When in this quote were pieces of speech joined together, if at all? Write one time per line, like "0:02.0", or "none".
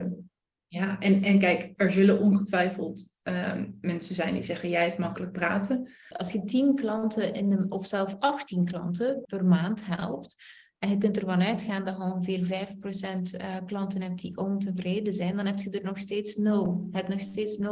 0:06.1
0:09.2